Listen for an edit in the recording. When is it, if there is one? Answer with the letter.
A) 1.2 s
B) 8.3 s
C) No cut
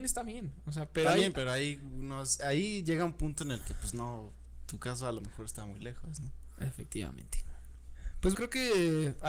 B